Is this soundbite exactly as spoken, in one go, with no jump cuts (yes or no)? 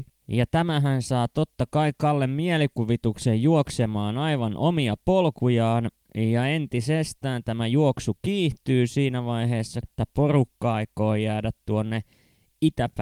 no